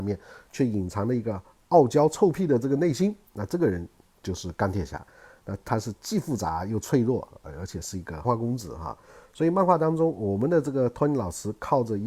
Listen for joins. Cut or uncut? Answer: cut